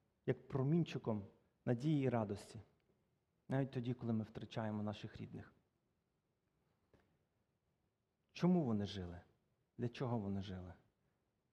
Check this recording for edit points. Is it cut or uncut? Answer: uncut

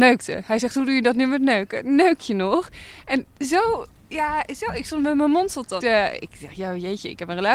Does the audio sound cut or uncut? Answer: cut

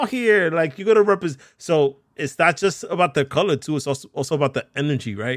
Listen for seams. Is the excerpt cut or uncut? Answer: uncut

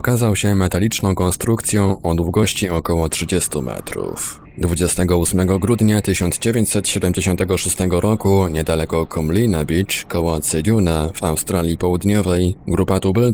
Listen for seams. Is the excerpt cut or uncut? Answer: cut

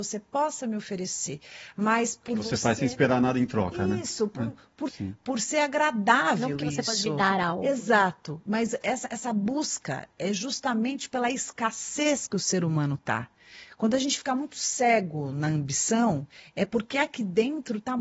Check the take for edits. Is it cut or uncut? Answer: cut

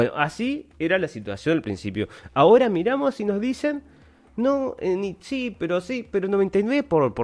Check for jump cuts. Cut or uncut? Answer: uncut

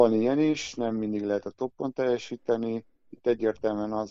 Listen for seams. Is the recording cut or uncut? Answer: uncut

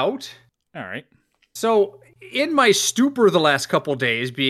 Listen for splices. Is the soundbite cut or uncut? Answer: uncut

